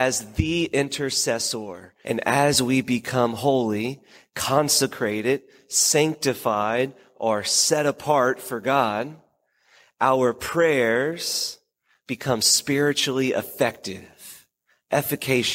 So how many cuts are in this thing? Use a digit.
1